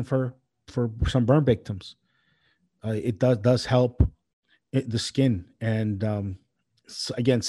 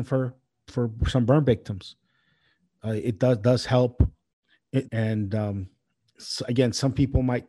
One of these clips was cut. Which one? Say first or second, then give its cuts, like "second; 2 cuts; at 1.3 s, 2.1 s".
second; 1 cut; at 4.8 s